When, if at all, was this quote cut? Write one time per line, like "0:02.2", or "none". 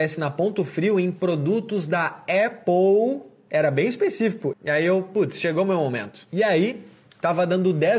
0:04.5